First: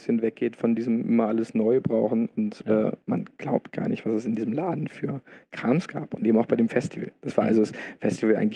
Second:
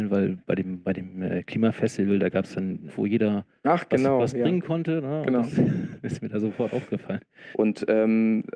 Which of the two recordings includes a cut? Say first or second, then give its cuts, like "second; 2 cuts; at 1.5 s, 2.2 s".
second; 2 cuts; at 2.9 s, 7.5 s